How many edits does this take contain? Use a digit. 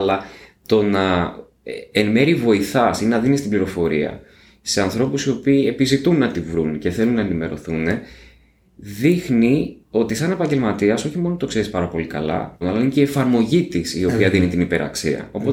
2